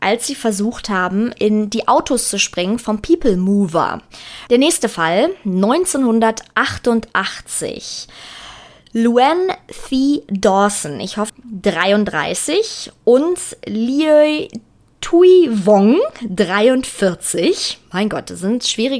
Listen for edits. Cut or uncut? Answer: cut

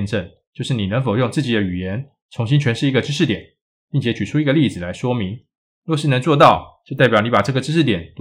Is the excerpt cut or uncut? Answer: uncut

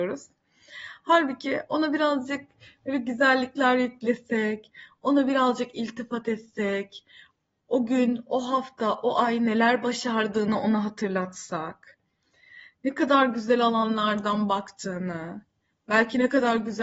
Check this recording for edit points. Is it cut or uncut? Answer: uncut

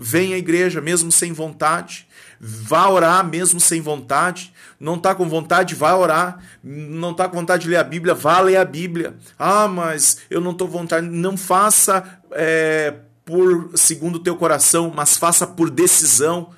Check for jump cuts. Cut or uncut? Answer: uncut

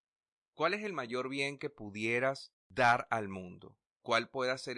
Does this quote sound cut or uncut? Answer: cut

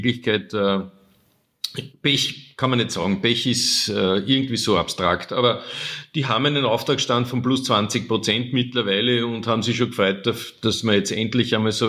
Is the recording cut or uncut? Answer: uncut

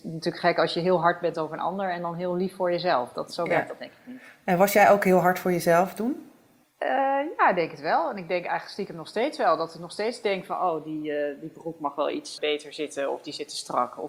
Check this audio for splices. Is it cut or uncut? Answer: cut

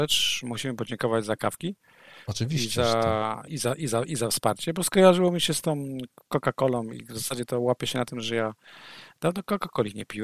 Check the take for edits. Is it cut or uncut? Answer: cut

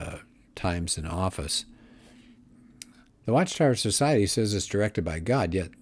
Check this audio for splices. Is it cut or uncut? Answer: cut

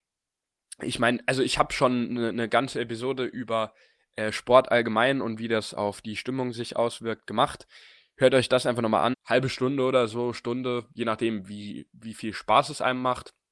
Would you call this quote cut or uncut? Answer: cut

